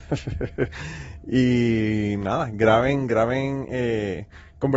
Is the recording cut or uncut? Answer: uncut